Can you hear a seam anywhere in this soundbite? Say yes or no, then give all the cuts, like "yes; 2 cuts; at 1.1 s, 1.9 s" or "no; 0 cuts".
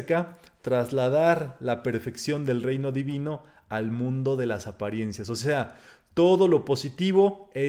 no; 0 cuts